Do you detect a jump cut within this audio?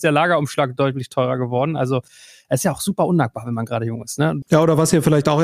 yes; 1 cut; at 4.4 s

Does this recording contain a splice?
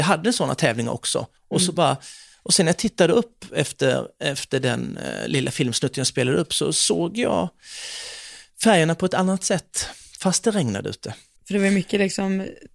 yes; 2 cuts; at 1.4 s, 11.4 s

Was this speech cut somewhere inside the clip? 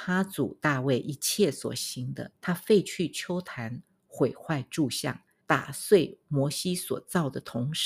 yes; 2 cuts; at 2.4 s, 5.4 s

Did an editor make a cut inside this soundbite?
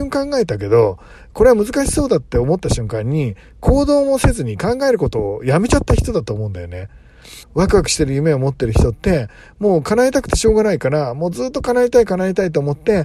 yes; 1 cut; at 7.4 s

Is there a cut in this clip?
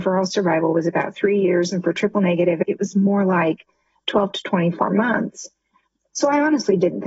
no; 0 cuts

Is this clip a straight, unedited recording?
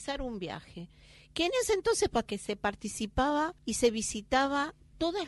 no; 2 cuts; at 2.3 s, 3.6 s

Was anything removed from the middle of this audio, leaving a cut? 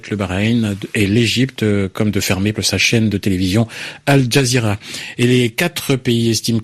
yes; 1 cut; at 2.5 s

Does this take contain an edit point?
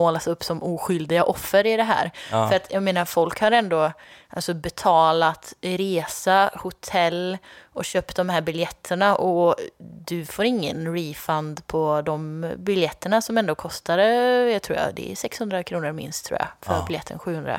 no; 0 cuts

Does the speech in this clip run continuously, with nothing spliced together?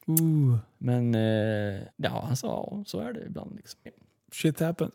no; 2 cuts; at 1.9 s, 3.9 s

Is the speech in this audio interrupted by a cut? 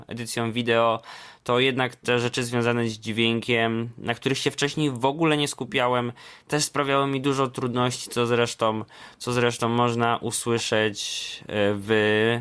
no; 0 cuts

